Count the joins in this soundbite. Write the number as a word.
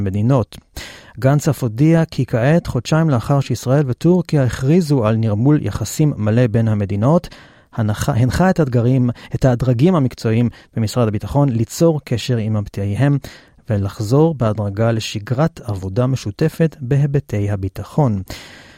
zero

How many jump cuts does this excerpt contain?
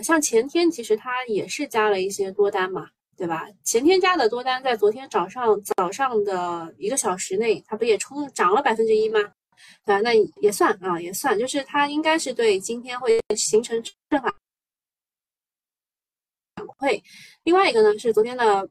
two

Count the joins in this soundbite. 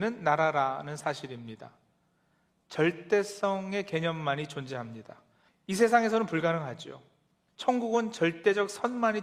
two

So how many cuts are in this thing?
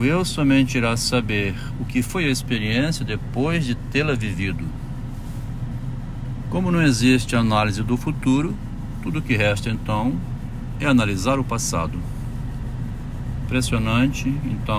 zero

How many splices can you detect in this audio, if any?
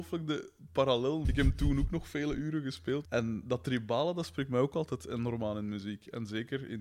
two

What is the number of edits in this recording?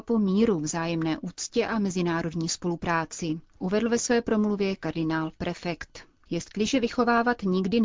zero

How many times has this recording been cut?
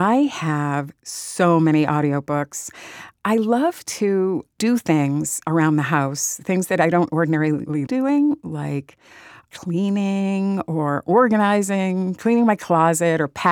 one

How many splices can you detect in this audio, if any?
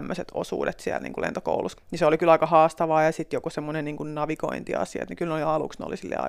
one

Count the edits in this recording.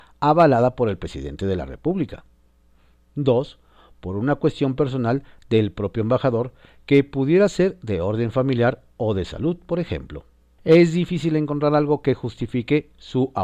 one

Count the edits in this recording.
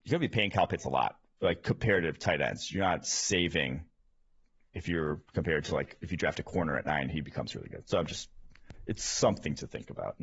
zero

